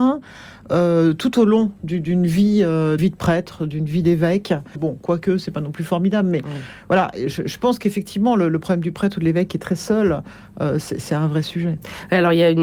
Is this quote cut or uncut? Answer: cut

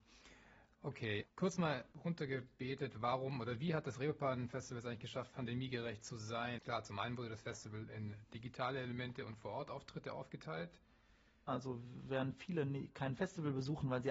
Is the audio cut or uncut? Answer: cut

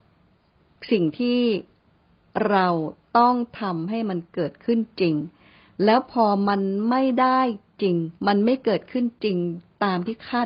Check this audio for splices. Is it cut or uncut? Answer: cut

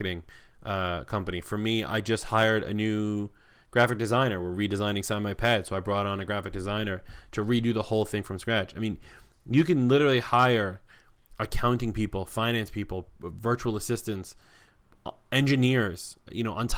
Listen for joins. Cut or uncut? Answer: uncut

